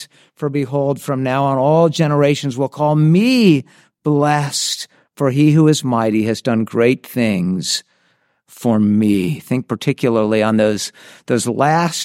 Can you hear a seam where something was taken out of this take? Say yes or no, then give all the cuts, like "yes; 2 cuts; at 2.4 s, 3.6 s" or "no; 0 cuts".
no; 0 cuts